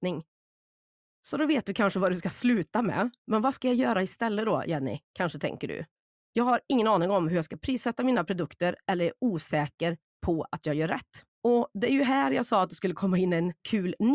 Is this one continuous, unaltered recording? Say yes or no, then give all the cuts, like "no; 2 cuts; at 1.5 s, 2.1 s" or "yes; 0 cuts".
no; 1 cut; at 11.3 s